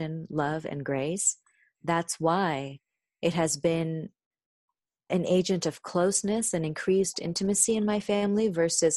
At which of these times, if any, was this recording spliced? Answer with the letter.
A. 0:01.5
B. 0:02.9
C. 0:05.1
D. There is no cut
C